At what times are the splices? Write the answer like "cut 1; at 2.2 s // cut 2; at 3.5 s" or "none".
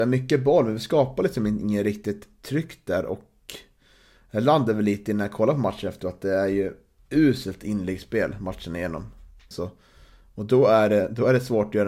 cut 1; at 9.5 s